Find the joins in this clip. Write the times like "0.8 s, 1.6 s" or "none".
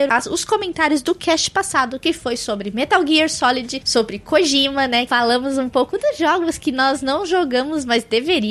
5.1 s